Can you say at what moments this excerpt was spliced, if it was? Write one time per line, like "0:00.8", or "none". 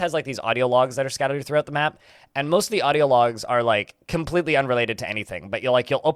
none